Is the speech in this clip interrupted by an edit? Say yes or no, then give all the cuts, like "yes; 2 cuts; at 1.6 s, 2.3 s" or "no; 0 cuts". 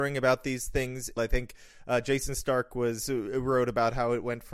yes; 1 cut; at 1.2 s